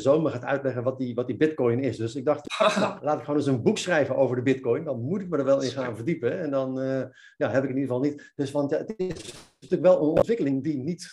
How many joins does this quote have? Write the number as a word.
zero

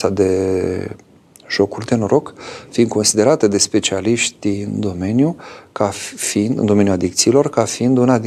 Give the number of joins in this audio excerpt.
zero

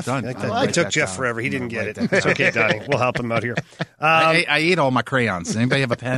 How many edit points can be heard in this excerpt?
zero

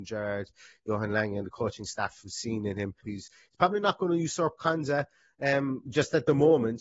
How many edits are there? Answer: one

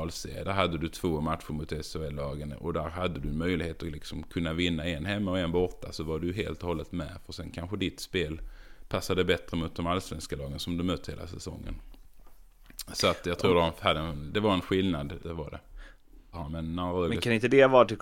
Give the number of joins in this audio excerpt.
two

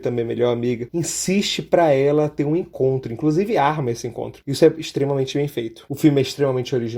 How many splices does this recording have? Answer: one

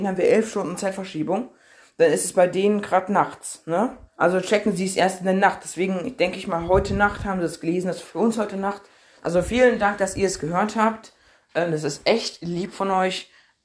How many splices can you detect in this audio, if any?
two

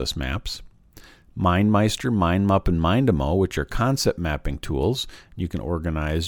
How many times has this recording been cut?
zero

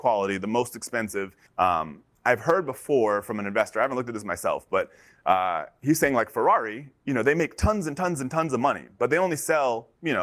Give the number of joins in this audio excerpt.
one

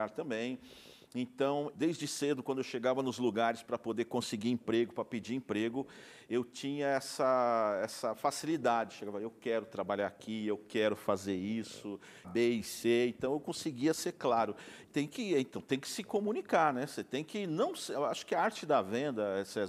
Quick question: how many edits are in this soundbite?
three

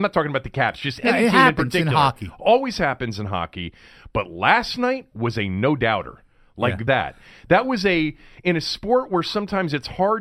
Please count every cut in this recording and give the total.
one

